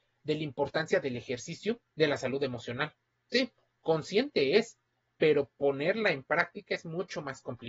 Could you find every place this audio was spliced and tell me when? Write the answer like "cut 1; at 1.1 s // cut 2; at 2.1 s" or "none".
cut 1; at 1.9 s